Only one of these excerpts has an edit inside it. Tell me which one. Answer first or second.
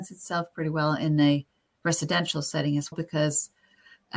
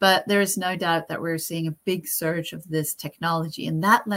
first